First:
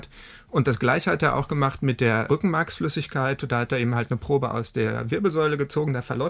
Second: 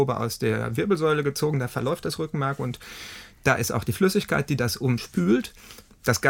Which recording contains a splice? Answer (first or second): first